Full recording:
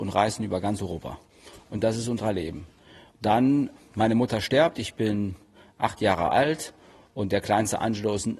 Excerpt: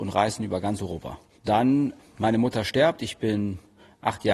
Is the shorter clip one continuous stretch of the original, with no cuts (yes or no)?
no